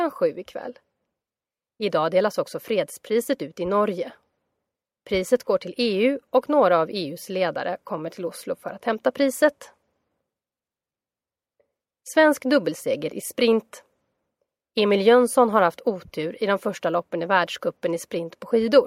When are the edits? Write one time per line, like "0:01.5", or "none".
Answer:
none